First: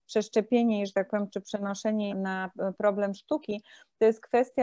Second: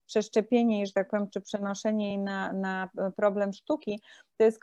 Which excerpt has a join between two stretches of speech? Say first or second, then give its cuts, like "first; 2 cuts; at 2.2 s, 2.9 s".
first; 1 cut; at 2.1 s